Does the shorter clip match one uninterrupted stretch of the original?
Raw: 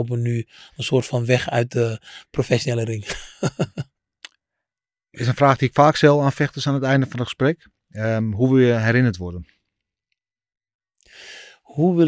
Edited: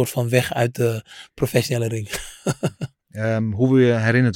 no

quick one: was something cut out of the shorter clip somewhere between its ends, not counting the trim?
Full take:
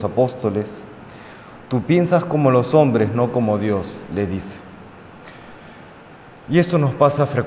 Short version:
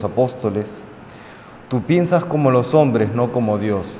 no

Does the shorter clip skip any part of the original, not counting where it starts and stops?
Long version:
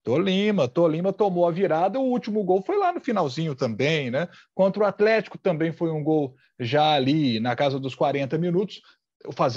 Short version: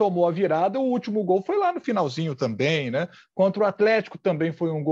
no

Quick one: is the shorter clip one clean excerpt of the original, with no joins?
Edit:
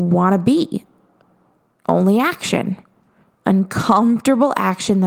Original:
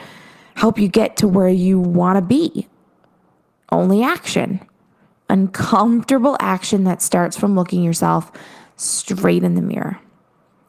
yes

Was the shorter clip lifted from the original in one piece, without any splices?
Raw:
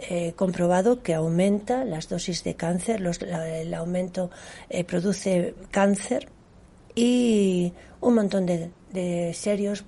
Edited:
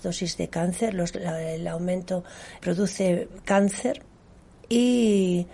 no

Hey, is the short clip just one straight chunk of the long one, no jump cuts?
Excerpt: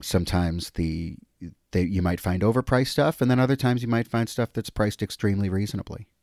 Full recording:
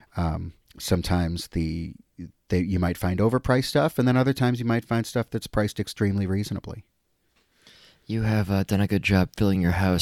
yes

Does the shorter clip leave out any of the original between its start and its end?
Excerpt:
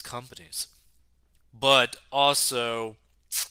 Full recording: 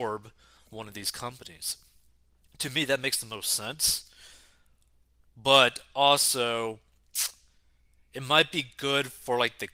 yes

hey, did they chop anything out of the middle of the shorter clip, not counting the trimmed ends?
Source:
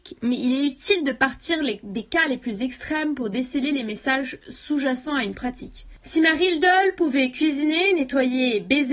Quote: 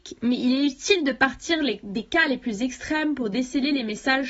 no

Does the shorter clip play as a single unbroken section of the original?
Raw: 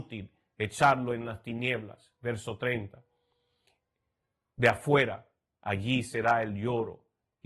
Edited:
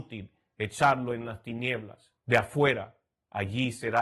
no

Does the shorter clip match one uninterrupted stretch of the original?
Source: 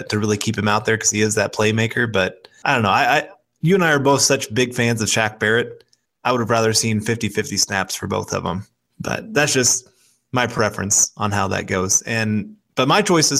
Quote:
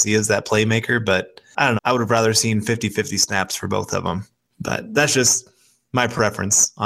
no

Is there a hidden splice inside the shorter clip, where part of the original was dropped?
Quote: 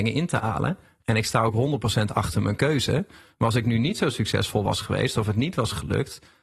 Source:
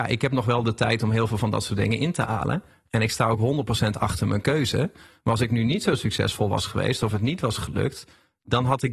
no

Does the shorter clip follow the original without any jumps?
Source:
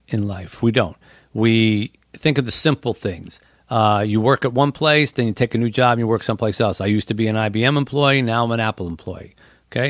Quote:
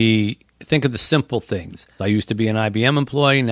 no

